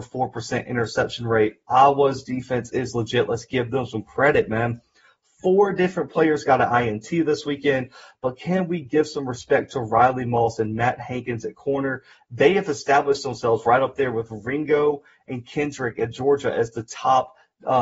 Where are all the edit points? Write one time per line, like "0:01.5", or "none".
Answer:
none